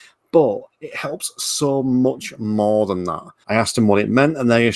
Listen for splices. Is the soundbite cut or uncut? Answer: cut